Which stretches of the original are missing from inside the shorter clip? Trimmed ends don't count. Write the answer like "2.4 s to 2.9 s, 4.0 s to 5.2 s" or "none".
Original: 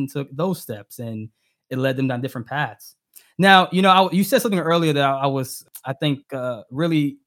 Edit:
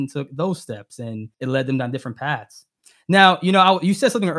1.3 s to 1.6 s